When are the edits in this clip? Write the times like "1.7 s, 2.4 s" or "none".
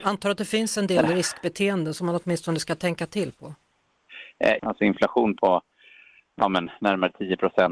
4.6 s